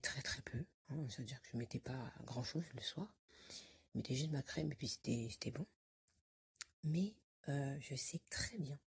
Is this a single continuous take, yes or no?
yes